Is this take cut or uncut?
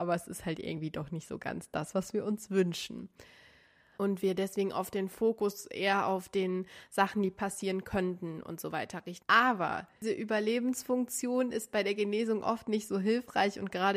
cut